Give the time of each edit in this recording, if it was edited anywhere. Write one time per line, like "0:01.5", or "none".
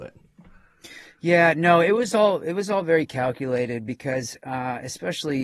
none